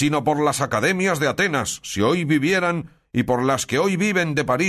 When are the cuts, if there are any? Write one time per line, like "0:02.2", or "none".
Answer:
none